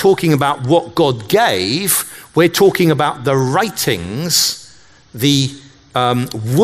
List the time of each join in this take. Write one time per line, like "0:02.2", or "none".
none